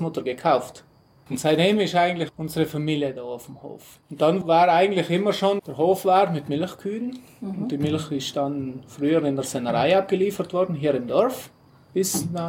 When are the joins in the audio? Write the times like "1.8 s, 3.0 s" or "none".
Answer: 1.3 s, 4.0 s, 5.6 s